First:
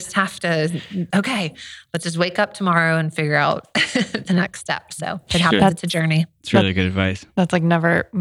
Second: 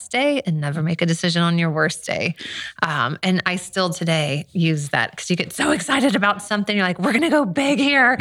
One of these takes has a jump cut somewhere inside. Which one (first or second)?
first